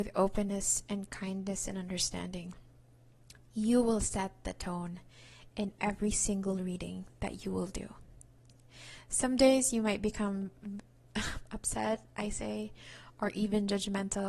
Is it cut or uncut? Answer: uncut